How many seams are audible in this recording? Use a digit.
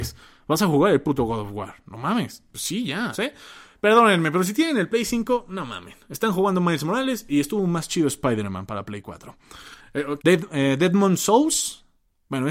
2